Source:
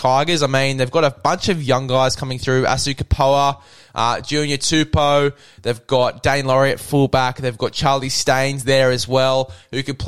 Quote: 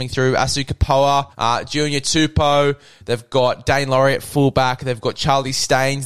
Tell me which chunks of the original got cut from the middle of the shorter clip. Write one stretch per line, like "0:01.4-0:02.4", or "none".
0:03.6-0:03.9